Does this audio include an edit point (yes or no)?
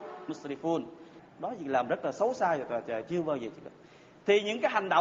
yes